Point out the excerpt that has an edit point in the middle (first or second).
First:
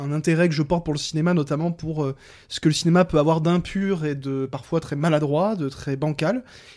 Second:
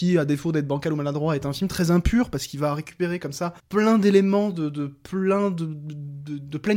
second